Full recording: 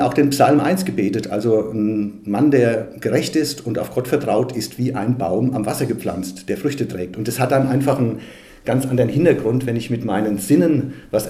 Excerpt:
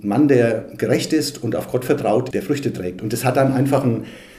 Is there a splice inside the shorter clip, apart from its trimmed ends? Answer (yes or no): yes